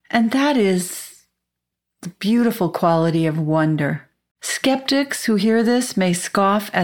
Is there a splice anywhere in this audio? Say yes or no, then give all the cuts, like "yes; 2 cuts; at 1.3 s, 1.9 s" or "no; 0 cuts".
yes; 1 cut; at 4.3 s